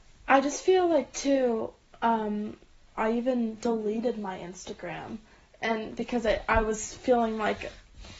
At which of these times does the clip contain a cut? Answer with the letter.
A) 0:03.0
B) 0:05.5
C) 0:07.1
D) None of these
A